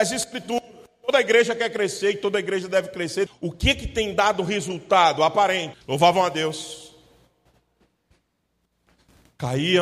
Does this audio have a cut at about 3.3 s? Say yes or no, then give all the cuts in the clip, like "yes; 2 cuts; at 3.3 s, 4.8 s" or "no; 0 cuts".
yes; 2 cuts; at 3.3 s, 5.7 s